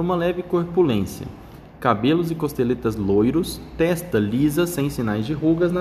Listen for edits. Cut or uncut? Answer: uncut